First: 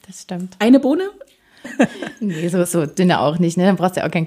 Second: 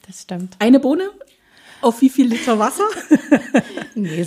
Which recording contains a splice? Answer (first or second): first